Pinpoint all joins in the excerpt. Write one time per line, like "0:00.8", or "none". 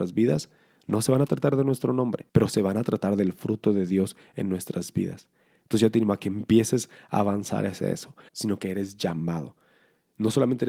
0:02.3
0:08.3